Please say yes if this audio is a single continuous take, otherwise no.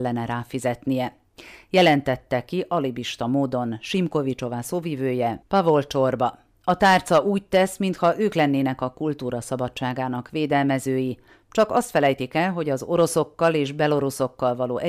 no